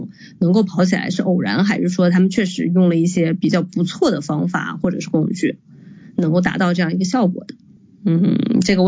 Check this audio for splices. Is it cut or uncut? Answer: uncut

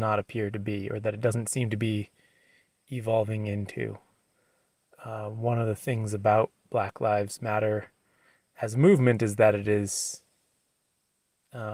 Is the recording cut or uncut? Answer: uncut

